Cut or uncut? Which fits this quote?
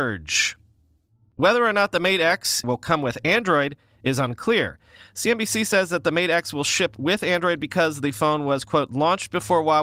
cut